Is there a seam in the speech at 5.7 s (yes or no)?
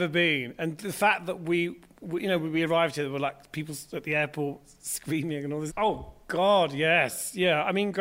yes